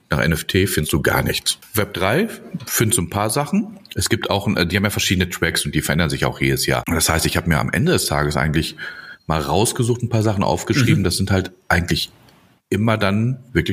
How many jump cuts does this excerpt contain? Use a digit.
1